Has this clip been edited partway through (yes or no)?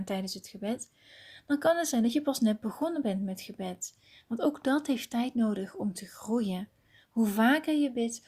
no